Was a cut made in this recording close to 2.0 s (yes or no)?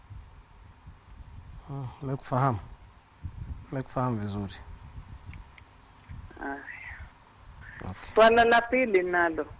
no